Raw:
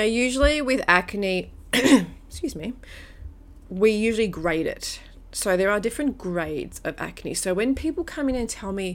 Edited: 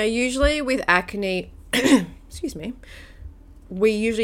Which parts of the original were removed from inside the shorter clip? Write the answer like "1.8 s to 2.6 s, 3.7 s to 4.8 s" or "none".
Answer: none